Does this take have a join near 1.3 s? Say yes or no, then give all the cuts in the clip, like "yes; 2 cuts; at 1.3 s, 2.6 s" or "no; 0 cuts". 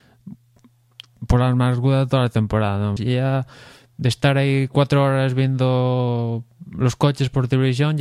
no; 1 cut; at 3.0 s